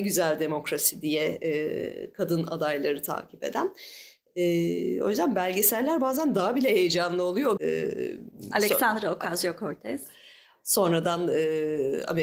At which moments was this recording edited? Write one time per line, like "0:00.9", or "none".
0:07.6